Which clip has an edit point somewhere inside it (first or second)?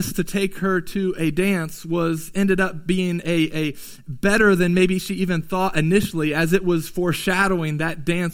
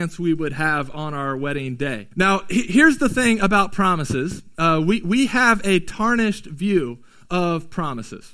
second